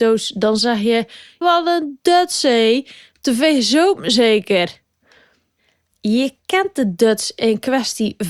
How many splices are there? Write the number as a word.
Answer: two